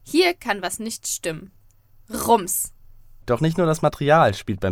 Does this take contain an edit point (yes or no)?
yes